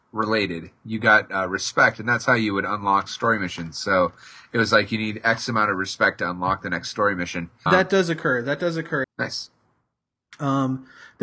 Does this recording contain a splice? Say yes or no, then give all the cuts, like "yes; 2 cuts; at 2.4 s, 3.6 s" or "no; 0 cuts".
yes; 2 cuts; at 7.7 s, 9.0 s